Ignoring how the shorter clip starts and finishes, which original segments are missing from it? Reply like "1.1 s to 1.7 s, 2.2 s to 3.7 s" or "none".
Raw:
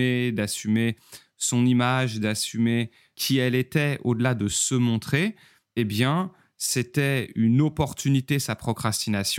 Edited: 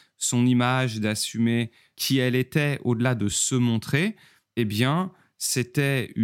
none